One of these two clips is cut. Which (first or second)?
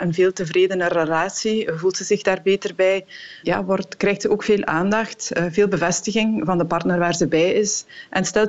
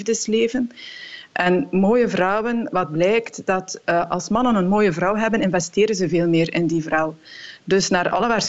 first